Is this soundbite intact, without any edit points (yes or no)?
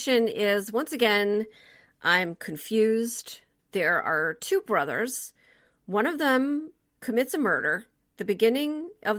no